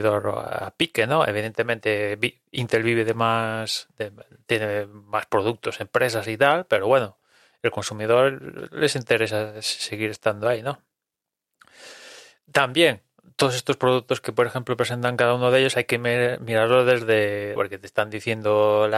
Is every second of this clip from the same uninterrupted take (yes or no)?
no